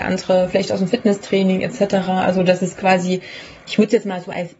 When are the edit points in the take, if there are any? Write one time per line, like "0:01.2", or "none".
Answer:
none